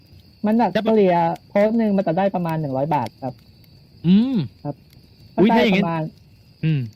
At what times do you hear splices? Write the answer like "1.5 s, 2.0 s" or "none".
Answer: 4.6 s